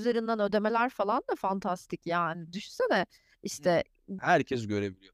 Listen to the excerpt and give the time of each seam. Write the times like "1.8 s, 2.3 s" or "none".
4.2 s